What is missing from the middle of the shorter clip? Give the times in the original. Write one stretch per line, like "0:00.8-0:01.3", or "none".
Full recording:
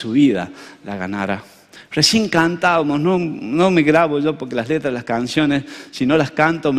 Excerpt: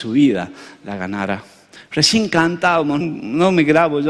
0:03.0-0:03.2